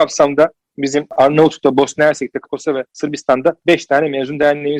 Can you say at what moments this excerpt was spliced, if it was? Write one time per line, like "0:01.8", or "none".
0:02.4